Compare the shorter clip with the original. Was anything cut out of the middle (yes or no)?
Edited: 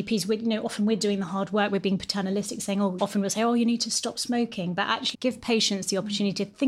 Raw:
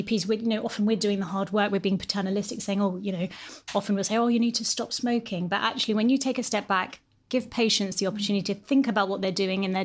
yes